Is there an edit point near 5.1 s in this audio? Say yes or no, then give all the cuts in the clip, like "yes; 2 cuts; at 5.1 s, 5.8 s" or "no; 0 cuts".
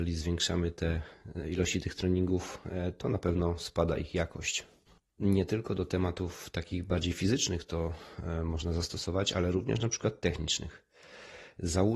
no; 0 cuts